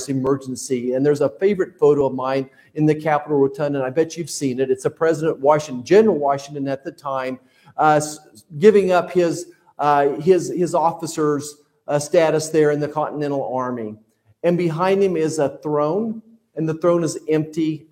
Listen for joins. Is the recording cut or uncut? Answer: uncut